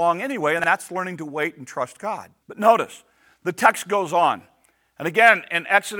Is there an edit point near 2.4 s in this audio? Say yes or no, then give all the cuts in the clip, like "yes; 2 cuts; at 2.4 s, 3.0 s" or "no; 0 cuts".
yes; 1 cut; at 2.4 s